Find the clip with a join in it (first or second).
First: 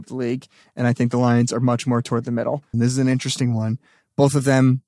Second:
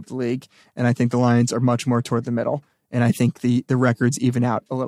first